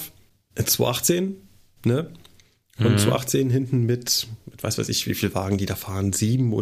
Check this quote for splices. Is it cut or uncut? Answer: uncut